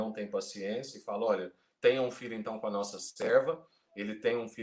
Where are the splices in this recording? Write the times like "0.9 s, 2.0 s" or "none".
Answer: none